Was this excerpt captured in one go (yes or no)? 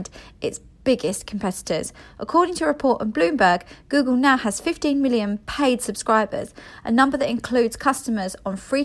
yes